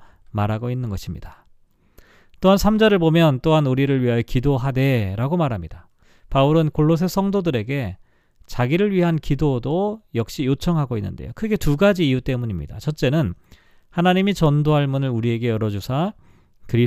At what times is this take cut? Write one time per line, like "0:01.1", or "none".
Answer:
none